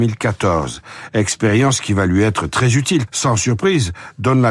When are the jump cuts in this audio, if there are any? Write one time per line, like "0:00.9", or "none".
0:03.1